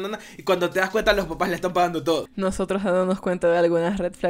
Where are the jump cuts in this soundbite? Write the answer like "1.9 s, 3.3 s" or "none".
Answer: 2.3 s